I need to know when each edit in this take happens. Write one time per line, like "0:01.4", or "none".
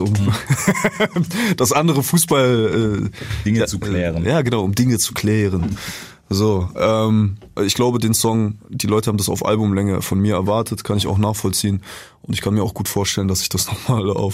0:07.6